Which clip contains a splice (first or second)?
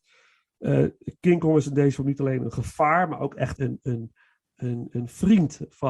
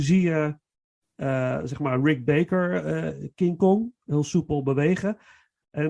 first